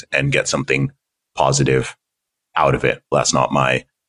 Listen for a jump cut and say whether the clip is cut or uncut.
cut